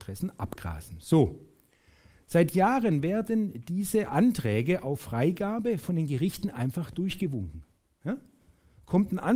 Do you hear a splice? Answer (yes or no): no